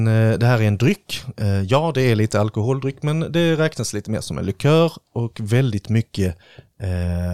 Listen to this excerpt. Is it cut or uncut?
uncut